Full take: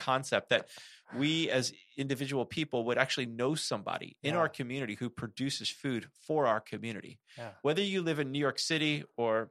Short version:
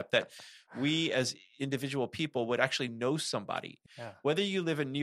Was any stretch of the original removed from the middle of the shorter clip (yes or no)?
yes